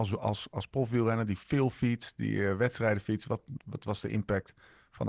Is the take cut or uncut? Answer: cut